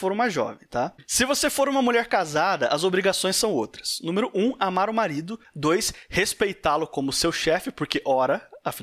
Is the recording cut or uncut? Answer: uncut